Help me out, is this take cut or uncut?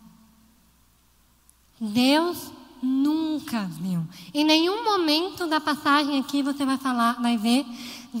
cut